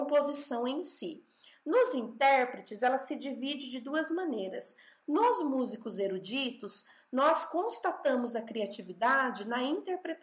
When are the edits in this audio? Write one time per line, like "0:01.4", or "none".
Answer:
none